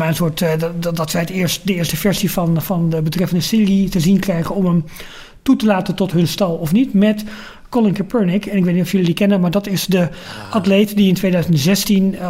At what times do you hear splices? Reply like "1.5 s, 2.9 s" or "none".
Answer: none